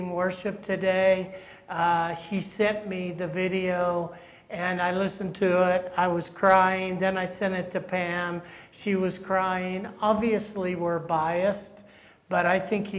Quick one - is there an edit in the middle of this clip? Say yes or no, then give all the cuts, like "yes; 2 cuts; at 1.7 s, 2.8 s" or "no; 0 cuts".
no; 0 cuts